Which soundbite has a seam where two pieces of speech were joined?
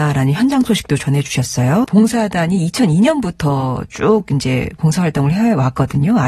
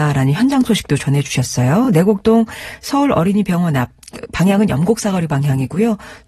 first; 1 cut; at 1.8 s

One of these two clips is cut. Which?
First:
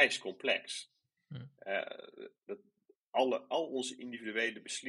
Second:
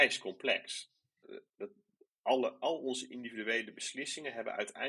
second; 1 cut; at 1.2 s

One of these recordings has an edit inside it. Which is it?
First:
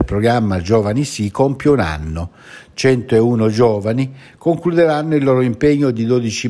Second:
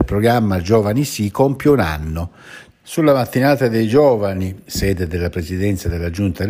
second; 2 cuts; at 2.7 s, 4.7 s

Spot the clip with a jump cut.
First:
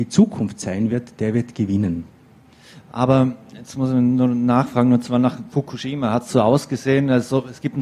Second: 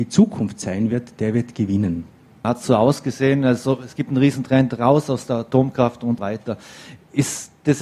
second; 2 cuts; at 2.4 s, 6.2 s

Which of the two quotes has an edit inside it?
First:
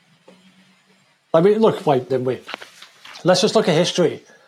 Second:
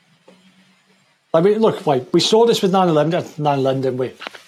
first; 1 cut; at 2.1 s

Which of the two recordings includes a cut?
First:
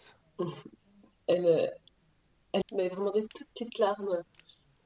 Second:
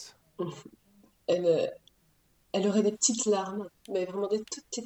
first; 1 cut; at 2.6 s

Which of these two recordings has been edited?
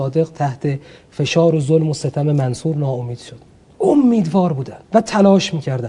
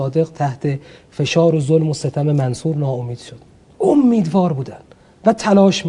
first; 1 cut; at 4.8 s

